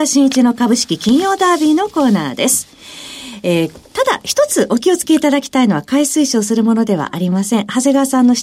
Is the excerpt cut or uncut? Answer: uncut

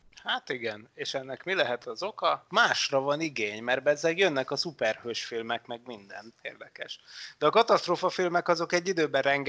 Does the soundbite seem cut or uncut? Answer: cut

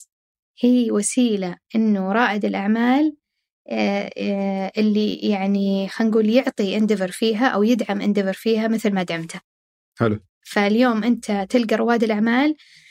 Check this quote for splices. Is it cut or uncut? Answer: uncut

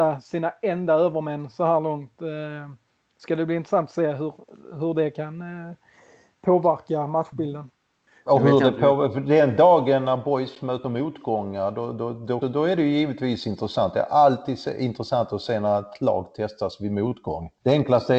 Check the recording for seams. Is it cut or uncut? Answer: cut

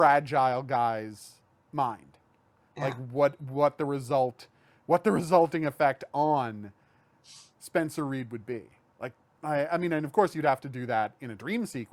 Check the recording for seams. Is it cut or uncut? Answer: uncut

